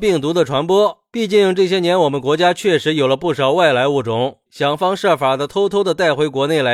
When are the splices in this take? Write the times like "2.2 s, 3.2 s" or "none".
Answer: 4.5 s